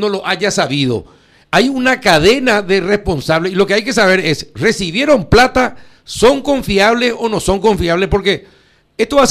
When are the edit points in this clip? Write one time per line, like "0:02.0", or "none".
none

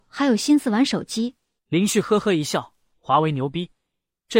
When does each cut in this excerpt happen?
0:01.6
0:02.9

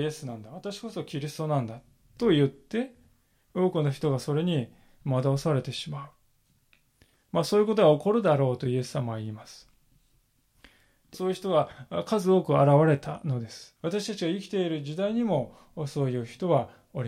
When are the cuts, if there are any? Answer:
0:11.1
0:13.8

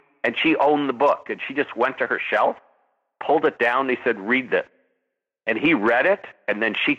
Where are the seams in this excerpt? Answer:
none

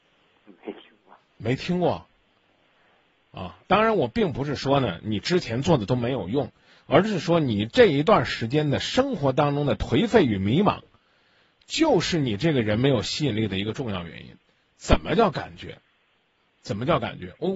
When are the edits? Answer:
0:03.6

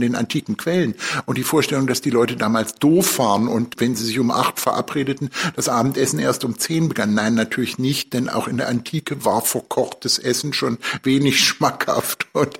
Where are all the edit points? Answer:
0:03.7

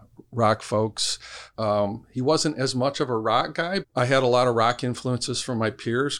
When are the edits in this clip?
0:01.5
0:03.8

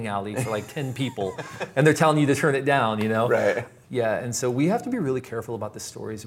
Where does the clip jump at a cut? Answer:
0:03.8

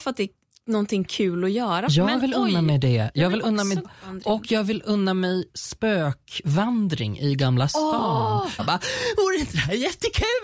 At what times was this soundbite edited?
0:03.8
0:08.6

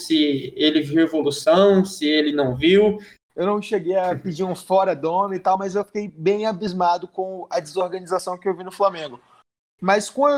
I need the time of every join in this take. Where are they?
0:03.2

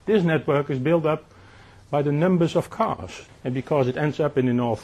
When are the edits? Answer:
0:03.3

